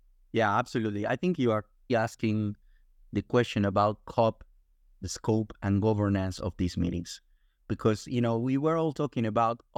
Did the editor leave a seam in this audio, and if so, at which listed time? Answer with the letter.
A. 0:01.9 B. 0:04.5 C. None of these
A